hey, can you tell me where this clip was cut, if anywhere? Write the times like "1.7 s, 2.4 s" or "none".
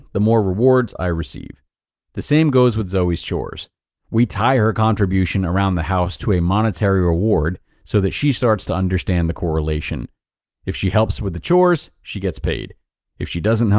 none